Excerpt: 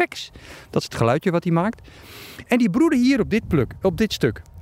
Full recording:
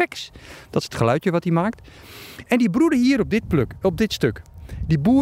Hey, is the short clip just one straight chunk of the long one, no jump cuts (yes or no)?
yes